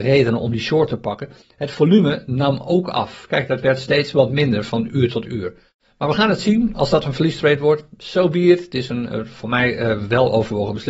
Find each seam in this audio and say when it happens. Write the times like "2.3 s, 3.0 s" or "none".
none

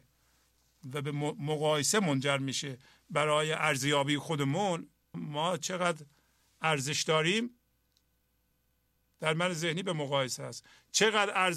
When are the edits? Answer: 5.1 s

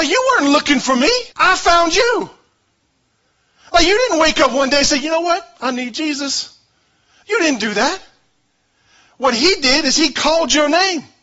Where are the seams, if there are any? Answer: 1.3 s

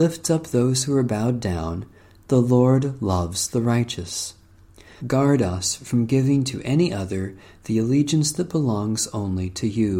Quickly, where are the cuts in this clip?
5.0 s

